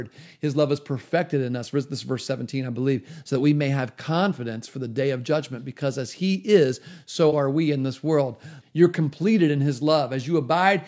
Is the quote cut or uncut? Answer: cut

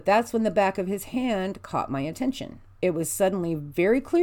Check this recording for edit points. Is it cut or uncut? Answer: cut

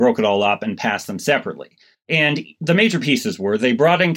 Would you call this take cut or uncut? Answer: cut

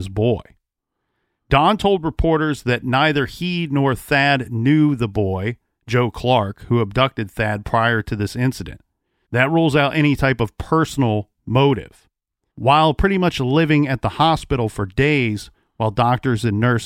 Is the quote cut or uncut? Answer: cut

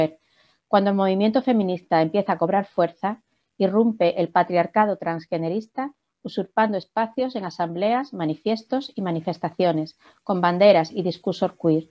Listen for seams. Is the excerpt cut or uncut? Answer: uncut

